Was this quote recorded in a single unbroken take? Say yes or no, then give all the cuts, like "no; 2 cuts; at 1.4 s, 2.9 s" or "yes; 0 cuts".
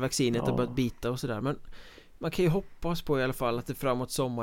yes; 0 cuts